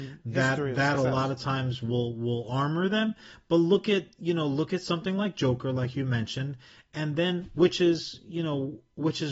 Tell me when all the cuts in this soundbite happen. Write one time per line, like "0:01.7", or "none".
none

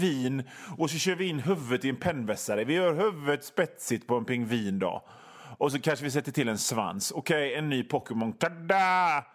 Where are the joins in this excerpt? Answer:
none

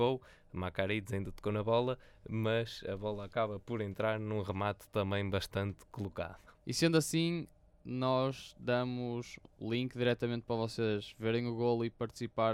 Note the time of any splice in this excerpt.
0:06.6

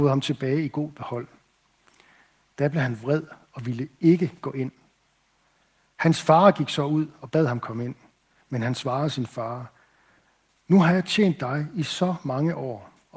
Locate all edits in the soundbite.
none

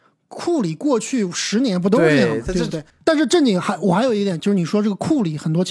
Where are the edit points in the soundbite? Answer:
0:02.9
0:04.4

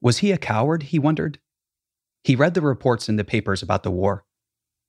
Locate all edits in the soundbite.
0:02.2

